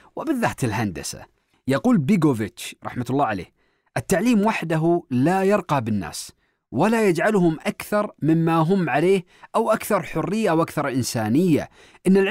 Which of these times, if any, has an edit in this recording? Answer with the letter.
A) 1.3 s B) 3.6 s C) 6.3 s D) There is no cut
D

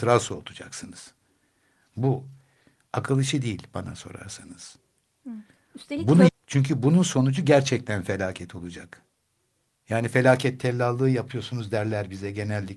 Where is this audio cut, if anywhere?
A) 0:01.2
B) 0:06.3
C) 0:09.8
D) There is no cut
B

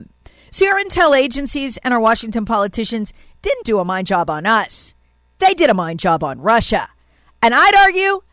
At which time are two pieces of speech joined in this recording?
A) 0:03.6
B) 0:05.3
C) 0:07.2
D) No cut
A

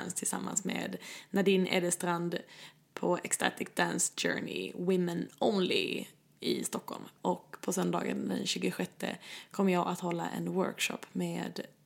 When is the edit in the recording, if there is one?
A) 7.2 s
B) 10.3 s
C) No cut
A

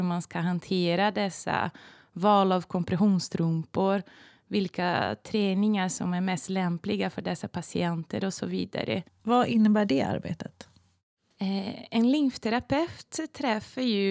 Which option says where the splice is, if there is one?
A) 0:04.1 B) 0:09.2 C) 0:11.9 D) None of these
B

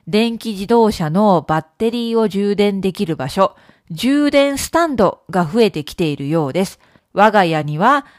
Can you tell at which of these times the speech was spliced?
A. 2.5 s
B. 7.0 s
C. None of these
B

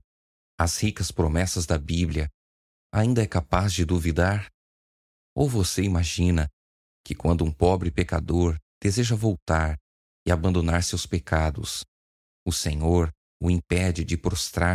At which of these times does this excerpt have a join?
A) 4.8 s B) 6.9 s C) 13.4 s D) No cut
C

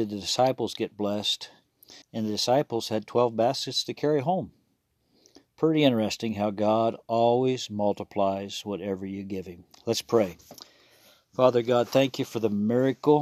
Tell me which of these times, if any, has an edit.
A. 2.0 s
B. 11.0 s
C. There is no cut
A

